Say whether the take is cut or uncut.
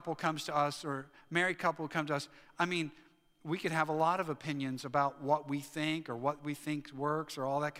uncut